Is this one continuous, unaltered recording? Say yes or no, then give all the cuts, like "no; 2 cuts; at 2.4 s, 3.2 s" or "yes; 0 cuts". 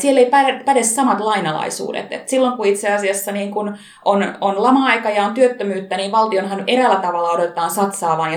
yes; 0 cuts